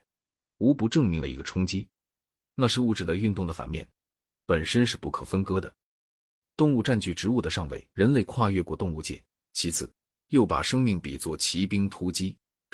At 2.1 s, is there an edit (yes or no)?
no